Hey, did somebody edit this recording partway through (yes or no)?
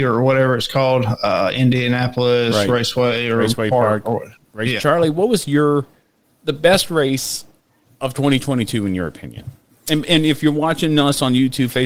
yes